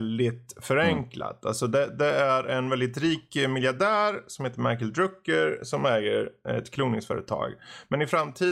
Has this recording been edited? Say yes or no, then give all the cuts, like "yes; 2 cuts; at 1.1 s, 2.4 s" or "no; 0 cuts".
no; 0 cuts